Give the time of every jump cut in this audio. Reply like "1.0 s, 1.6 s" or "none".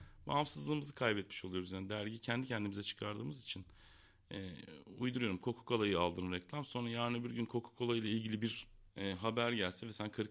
8.9 s